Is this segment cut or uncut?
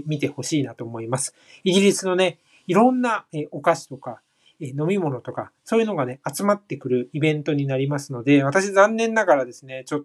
uncut